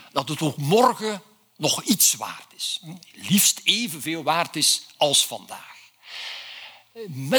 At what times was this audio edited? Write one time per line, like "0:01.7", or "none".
none